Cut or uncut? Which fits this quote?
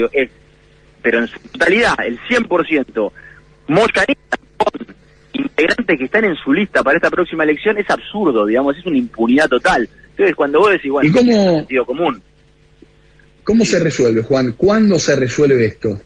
uncut